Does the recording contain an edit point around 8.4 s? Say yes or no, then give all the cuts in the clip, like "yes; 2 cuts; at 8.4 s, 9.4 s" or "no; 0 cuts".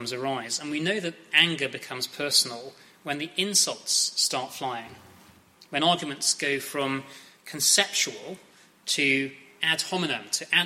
no; 0 cuts